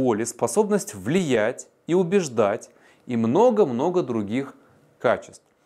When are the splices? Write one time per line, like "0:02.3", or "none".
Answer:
none